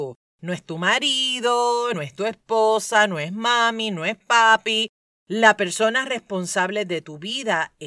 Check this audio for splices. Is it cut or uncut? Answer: cut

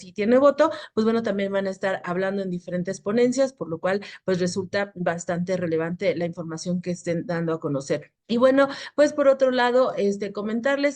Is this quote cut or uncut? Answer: cut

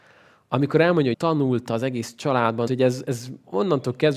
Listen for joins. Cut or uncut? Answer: cut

